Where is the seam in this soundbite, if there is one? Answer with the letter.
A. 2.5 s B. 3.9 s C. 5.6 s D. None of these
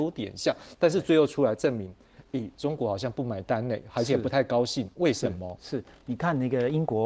D